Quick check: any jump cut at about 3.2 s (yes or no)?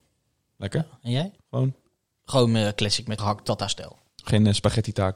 yes